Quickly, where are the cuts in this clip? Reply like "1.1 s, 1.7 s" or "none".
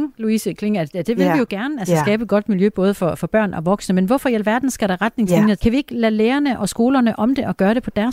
5.6 s